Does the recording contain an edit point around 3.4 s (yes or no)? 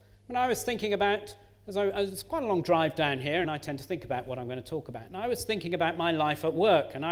yes